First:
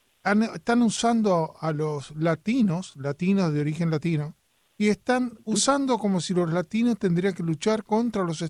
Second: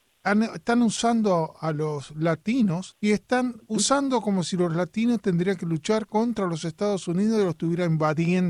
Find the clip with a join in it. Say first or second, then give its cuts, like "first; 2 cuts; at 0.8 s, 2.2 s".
second; 1 cut; at 2.9 s